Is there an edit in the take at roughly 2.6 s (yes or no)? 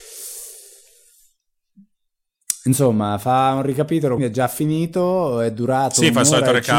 no